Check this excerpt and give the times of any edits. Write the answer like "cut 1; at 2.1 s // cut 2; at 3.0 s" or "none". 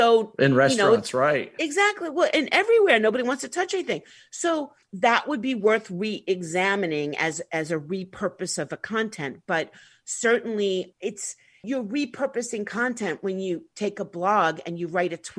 cut 1; at 4.8 s